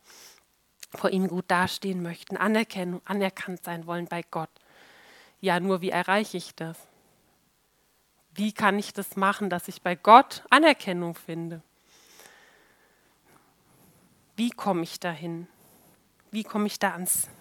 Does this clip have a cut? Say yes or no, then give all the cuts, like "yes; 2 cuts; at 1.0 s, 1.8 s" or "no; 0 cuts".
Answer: no; 0 cuts